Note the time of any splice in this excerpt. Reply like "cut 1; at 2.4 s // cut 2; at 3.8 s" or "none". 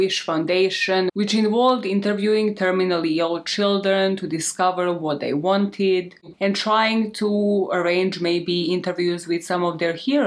cut 1; at 6.3 s